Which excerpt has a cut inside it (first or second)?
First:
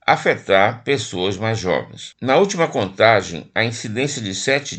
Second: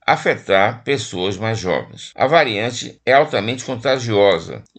first